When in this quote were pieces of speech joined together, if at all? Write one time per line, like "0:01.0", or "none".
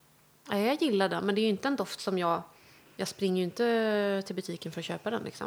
none